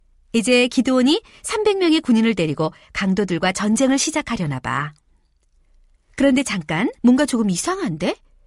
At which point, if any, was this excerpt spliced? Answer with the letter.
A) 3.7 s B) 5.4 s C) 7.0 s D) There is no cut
C